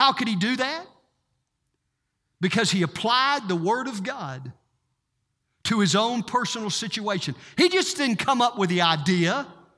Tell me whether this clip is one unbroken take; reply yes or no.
yes